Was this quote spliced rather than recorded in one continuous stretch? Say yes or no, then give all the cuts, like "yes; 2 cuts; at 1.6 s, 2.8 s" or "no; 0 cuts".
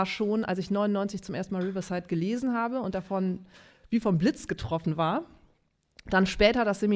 no; 0 cuts